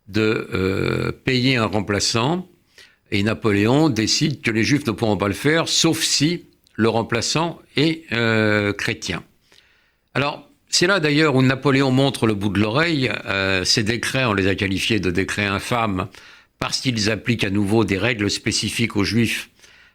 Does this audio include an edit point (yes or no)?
no